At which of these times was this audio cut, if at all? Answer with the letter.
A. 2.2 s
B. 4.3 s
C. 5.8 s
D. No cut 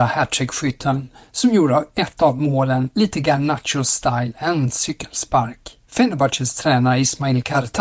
C